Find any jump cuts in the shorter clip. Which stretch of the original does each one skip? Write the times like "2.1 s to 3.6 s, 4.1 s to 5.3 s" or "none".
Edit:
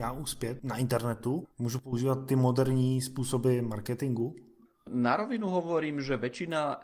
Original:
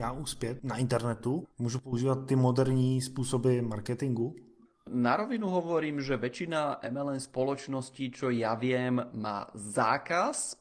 none